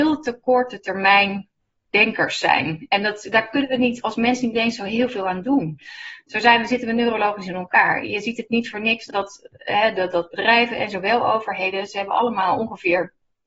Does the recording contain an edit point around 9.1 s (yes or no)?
yes